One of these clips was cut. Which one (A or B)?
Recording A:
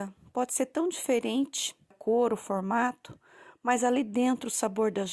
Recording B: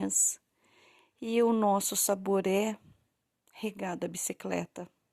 A